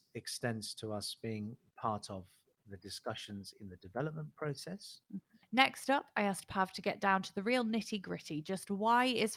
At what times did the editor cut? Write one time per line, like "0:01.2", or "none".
0:05.4